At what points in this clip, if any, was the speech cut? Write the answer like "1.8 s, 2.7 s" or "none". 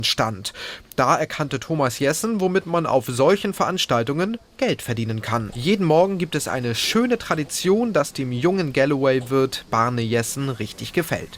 5.5 s